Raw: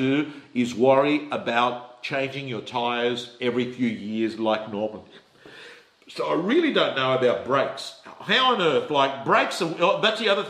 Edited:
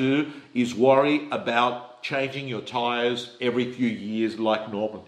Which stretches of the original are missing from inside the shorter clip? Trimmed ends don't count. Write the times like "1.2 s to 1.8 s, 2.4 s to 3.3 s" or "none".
none